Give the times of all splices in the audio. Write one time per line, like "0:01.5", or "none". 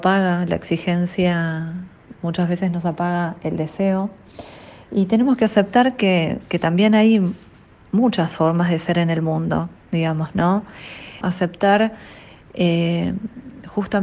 0:11.2

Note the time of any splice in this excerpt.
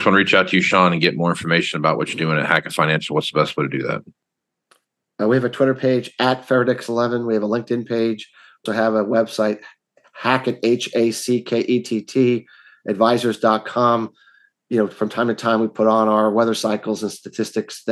0:08.7

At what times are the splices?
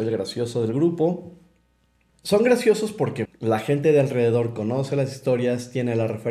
0:02.1
0:03.3

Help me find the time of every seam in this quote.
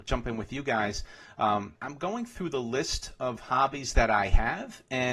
0:01.8

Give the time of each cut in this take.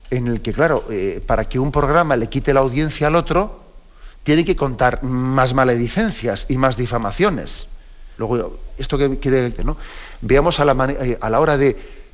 0:08.2
0:09.6

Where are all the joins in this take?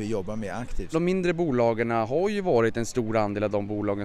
0:00.9

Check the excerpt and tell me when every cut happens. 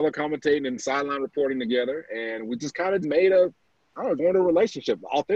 0:03.0
0:04.2

